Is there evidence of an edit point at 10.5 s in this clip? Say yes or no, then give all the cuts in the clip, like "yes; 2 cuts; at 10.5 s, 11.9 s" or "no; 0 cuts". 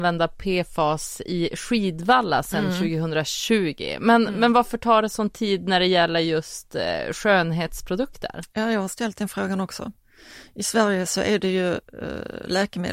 no; 0 cuts